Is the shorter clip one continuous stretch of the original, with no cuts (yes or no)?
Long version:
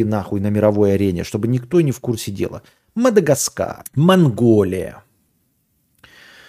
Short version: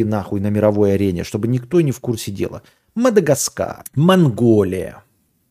yes